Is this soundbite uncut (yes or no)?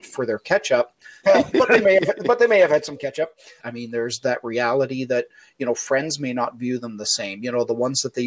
no